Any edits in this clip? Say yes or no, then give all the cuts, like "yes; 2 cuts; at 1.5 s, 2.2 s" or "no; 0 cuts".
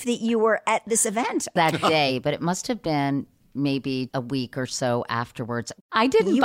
yes; 2 cuts; at 1.6 s, 4.1 s